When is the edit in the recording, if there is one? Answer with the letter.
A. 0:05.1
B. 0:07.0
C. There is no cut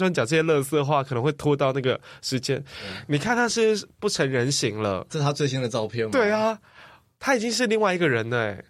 A